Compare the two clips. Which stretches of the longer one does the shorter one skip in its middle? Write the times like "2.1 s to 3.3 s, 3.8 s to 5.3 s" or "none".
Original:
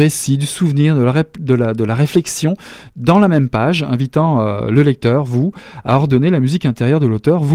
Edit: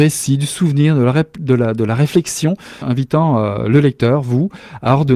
2.8 s to 3.8 s